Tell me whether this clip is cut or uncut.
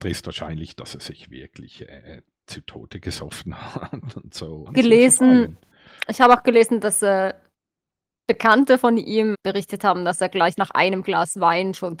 cut